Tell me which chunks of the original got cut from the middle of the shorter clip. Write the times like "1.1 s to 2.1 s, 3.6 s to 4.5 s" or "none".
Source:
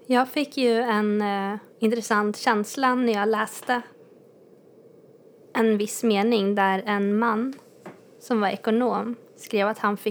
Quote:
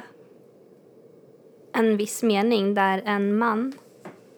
none